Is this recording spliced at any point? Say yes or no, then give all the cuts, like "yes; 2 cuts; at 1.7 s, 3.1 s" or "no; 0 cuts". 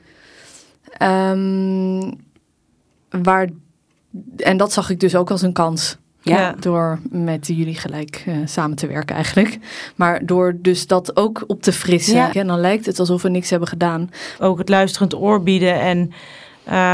yes; 2 cuts; at 12.3 s, 14.4 s